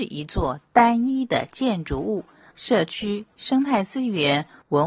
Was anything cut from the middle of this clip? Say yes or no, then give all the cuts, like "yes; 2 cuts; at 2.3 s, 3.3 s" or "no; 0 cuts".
yes; 1 cut; at 2.5 s